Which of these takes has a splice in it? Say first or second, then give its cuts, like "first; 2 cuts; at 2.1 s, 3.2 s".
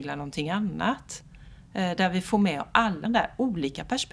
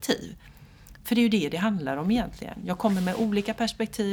first; 1 cut; at 3.1 s